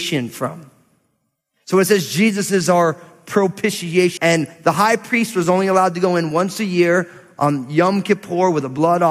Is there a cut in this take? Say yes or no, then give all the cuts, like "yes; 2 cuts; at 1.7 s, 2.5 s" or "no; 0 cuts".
yes; 1 cut; at 4.2 s